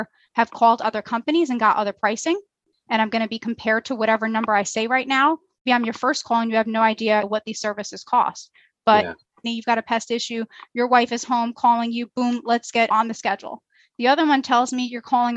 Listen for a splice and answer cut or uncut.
cut